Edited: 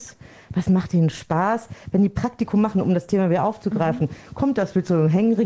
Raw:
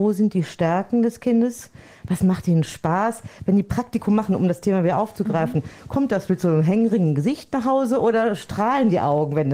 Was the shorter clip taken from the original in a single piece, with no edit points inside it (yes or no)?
yes